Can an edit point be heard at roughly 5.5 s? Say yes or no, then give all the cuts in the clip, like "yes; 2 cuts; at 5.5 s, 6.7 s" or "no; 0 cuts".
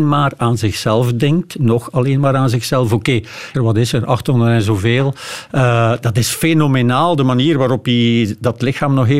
no; 1 cut; at 3.5 s